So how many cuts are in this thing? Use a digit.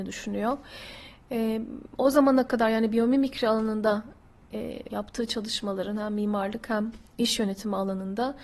1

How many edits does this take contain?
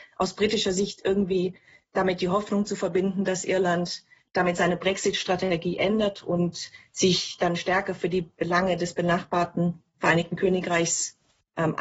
0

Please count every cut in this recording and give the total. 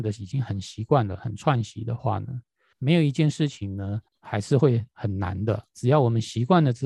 2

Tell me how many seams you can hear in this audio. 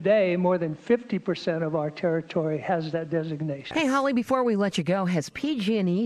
1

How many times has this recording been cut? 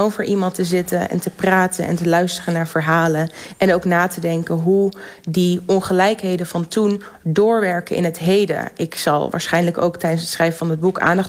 0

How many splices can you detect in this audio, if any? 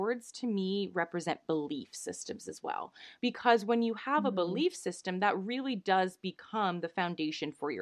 0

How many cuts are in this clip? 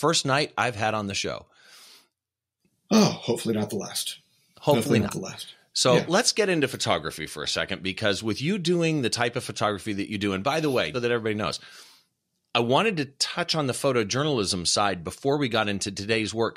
1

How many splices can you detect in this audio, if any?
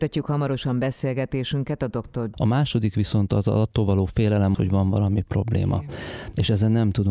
2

